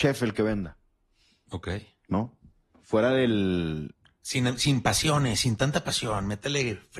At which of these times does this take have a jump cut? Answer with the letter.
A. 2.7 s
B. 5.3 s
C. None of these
A